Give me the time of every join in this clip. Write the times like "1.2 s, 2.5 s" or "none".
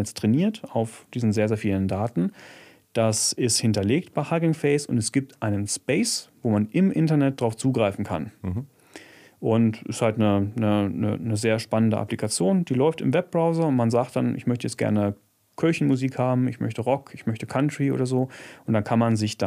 none